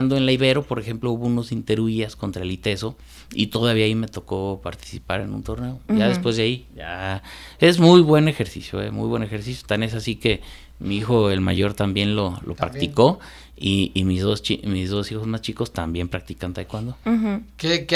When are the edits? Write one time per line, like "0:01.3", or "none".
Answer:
0:06.7